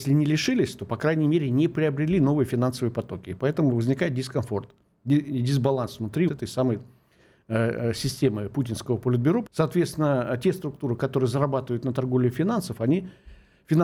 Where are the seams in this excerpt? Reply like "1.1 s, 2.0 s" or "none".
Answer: 6.3 s, 9.5 s